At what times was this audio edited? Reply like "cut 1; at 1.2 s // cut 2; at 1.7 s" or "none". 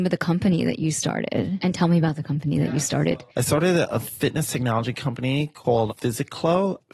none